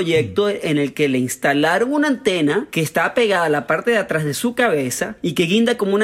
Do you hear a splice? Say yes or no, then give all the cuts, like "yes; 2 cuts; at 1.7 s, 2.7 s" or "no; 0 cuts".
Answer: no; 0 cuts